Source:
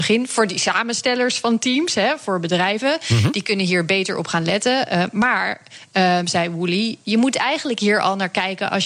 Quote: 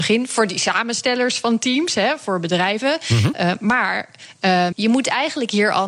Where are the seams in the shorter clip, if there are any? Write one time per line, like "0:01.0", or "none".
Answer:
0:03.3
0:04.7

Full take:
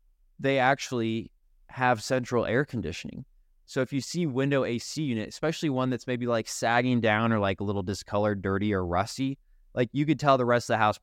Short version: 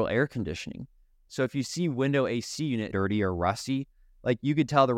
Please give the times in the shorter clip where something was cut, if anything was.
0:02.9

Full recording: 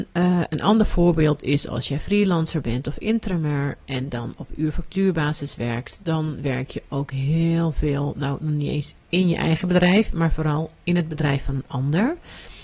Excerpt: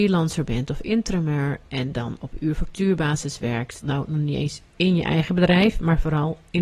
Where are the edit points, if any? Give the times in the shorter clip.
0:03.8

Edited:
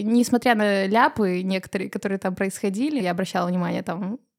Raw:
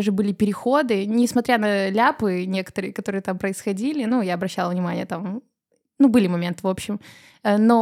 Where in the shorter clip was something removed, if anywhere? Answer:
0:03.0

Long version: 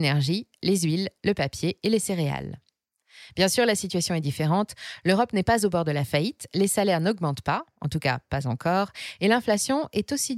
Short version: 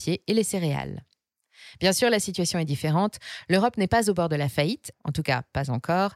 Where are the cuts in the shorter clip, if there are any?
0:04.9

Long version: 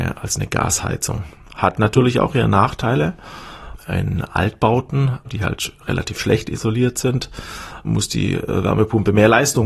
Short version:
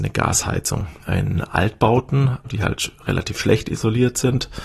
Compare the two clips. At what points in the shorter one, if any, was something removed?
0:01.0

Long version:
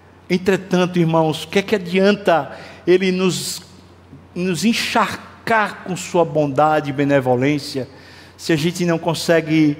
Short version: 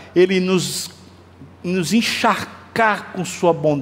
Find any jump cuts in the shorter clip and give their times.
none

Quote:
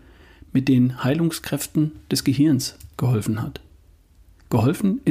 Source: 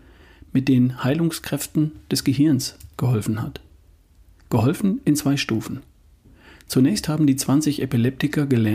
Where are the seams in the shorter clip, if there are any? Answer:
none

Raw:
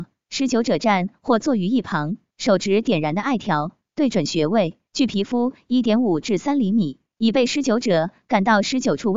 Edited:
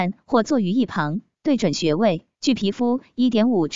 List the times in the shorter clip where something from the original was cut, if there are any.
0:01.4

